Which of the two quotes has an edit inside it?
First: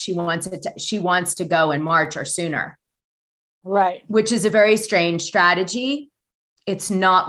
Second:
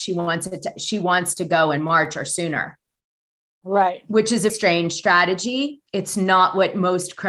second; 2 cuts; at 4.5 s, 5.9 s

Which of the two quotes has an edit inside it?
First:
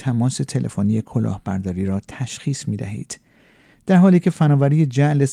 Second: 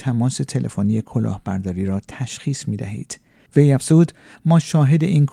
second; 1 cut; at 3.5 s

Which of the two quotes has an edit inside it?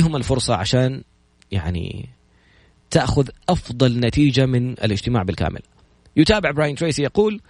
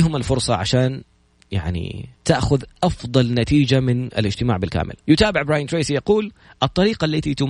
second; 2 cuts; at 2.2 s, 5.0 s

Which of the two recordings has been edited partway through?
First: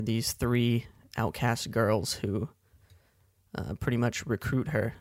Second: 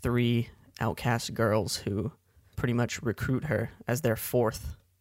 second; 1 cut; at 2.5 s

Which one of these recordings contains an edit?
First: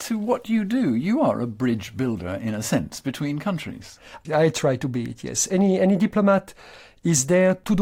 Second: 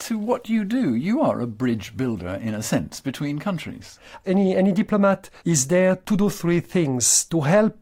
second; 2 cuts; at 4.2 s, 5.4 s

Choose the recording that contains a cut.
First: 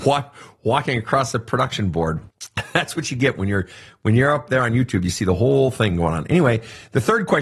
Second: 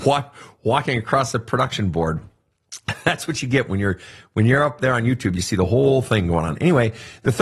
first; 1 cut; at 2.3 s

